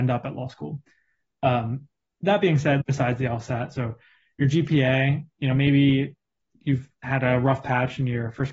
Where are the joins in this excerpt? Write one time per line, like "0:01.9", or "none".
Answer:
0:02.8